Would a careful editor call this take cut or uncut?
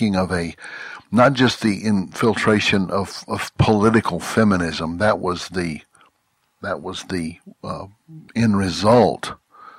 cut